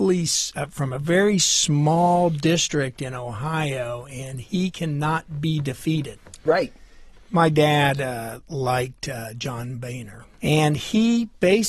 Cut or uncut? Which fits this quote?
cut